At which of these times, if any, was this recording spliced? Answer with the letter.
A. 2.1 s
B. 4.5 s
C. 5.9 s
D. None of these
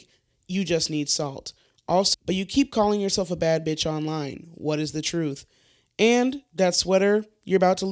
A